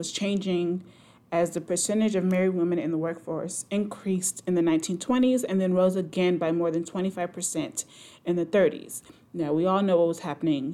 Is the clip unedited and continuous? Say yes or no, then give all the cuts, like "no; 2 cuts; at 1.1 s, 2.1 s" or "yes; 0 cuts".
yes; 0 cuts